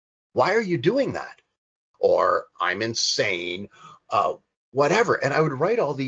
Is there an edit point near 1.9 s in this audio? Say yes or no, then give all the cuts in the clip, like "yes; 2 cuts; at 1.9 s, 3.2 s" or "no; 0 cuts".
yes; 1 cut; at 1.9 s